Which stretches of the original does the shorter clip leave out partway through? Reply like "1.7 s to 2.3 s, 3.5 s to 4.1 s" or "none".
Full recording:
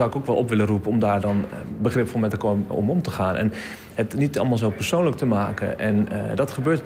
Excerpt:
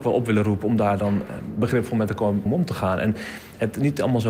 2.7 s to 2.8 s